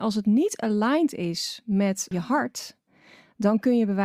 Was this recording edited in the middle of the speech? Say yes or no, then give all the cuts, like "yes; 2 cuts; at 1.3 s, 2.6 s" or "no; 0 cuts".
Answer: yes; 1 cut; at 2.1 s